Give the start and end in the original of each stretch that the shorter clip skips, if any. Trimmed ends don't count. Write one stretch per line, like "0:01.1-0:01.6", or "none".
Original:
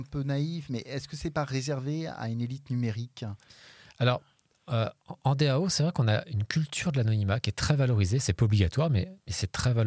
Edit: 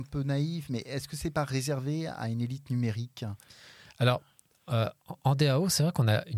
none